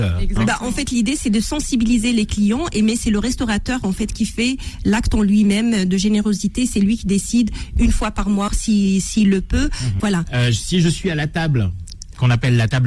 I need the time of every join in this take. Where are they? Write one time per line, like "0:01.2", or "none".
0:08.5
0:10.0